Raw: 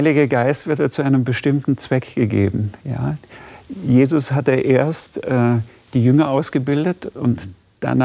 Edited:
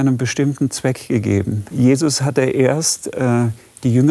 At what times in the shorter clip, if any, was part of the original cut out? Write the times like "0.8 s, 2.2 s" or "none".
1.7 s